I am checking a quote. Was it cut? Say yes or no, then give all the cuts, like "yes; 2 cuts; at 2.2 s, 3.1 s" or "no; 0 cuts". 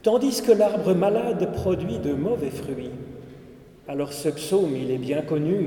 yes; 1 cut; at 3.8 s